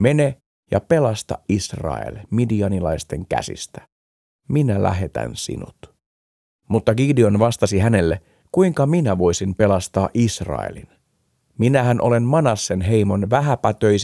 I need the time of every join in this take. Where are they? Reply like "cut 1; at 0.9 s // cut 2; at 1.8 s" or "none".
cut 1; at 8.4 s

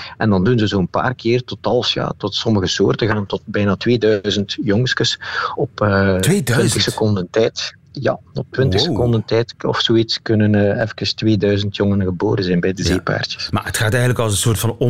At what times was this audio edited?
none

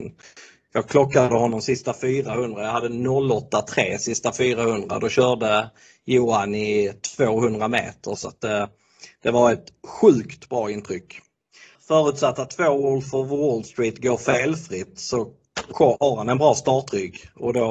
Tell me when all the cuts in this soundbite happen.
cut 1; at 8.2 s // cut 2; at 11.7 s

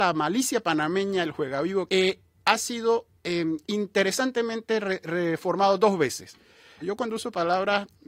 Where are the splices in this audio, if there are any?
cut 1; at 1.9 s // cut 2; at 3.6 s // cut 3; at 6.8 s

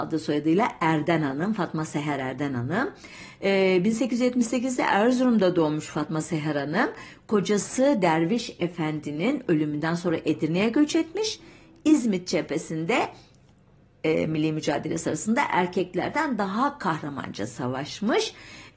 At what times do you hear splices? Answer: none

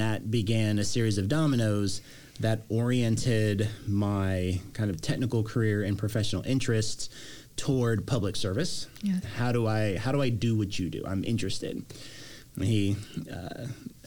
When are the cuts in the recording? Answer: cut 1; at 9.2 s

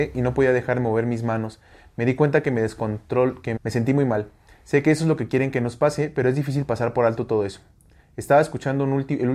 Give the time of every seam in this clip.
cut 1; at 3.6 s

